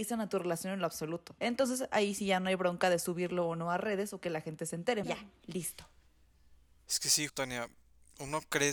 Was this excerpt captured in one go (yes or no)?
no